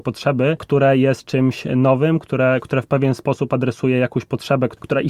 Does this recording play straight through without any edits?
yes; 0 cuts

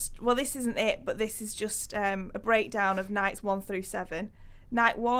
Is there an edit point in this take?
no; 0 cuts

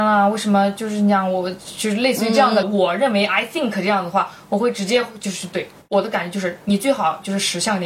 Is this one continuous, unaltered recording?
no; 2 cuts; at 2.6 s, 5.8 s

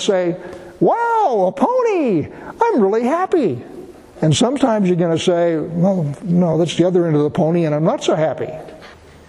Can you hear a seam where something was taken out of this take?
no; 0 cuts

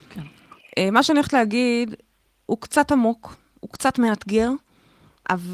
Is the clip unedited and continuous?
no; 1 cut; at 2.5 s

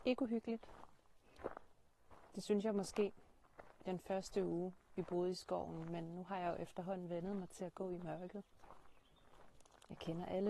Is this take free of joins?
yes; 0 cuts

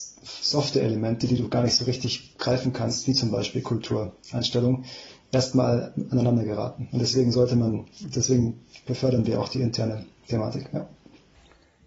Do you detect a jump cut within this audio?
no; 0 cuts

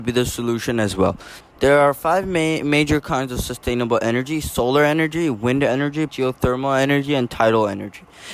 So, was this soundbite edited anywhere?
yes; 2 cuts; at 1.4 s, 6.1 s

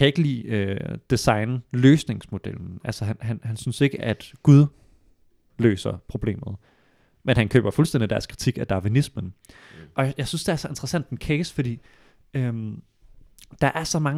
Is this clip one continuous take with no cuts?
yes; 0 cuts

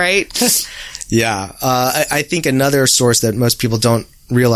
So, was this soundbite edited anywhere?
no; 0 cuts

